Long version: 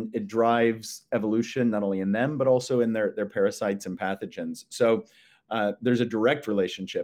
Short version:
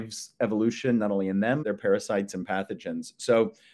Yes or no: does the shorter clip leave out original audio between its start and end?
yes